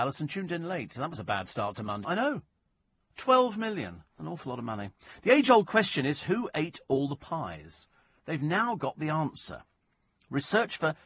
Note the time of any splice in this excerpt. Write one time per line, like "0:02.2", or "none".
0:02.0
0:04.1